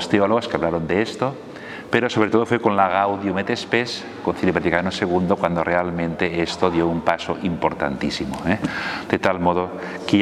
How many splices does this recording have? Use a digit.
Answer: 0